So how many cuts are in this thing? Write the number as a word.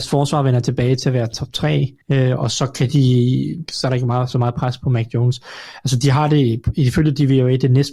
two